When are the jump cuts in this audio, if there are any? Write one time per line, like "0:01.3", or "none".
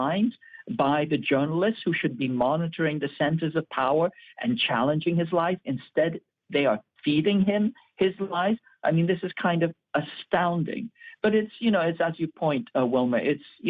none